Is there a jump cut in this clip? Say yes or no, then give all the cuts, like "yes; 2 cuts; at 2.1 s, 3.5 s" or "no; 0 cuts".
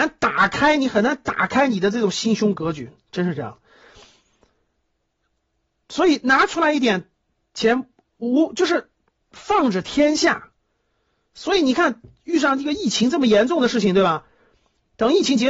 no; 0 cuts